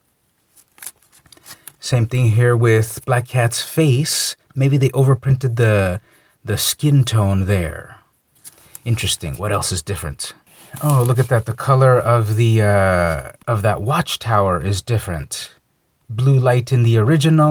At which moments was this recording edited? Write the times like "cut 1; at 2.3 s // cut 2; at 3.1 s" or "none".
cut 1; at 4.5 s